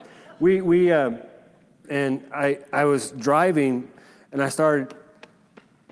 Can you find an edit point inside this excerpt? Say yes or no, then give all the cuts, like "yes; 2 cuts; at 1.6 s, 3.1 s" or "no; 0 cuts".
yes; 1 cut; at 1.8 s